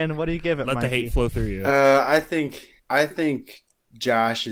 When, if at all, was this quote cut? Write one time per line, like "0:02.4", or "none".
0:02.8